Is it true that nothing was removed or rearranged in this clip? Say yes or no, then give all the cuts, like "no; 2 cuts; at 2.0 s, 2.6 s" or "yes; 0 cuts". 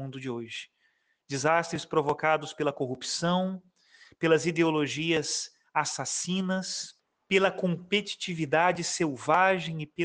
yes; 0 cuts